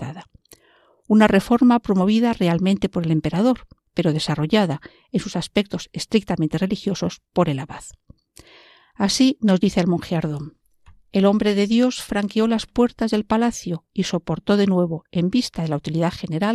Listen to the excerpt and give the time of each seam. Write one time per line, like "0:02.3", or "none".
none